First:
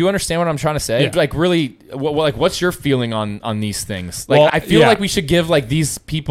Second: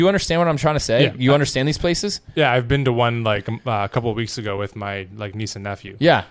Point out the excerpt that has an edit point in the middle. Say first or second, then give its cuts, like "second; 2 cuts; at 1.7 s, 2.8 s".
first; 2 cuts; at 1.1 s, 4.5 s